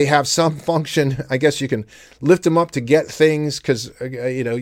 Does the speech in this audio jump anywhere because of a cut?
no; 0 cuts

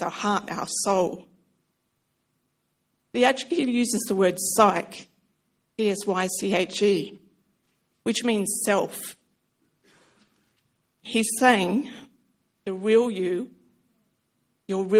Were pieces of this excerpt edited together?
yes; 3 cuts; at 3.1 s, 11.0 s, 12.5 s

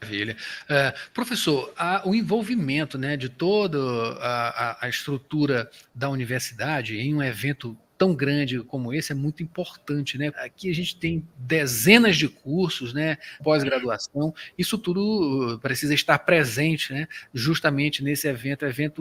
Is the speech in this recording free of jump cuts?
no; 2 cuts; at 10.3 s, 13.4 s

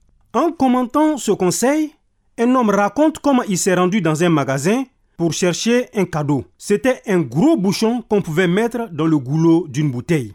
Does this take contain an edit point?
yes; 1 cut; at 6.5 s

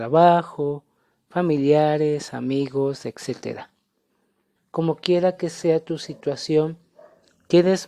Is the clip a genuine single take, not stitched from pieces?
no; 1 cut; at 4.6 s

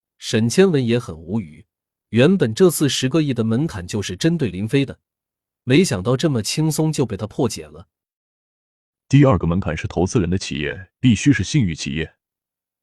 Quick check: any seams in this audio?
no; 0 cuts

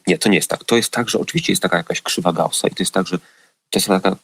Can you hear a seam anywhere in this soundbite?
no; 0 cuts

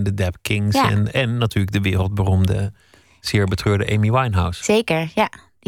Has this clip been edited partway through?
no; 0 cuts

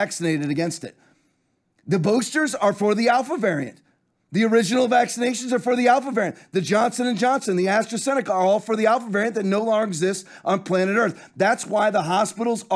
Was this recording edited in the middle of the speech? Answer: no; 0 cuts

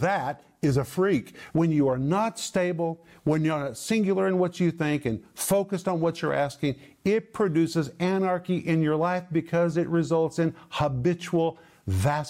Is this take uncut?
no; 1 cut; at 1.5 s

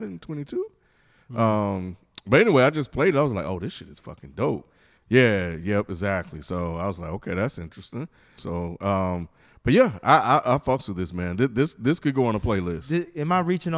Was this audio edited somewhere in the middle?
yes; 2 cuts; at 5.0 s, 8.4 s

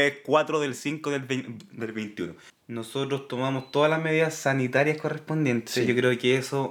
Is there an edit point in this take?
yes; 1 cut; at 2.5 s

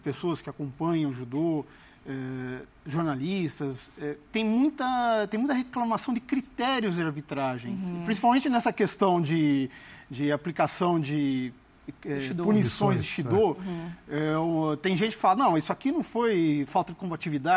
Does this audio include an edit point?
no; 0 cuts

